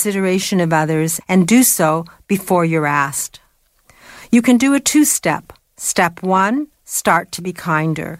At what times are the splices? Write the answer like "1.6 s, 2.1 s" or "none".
1.2 s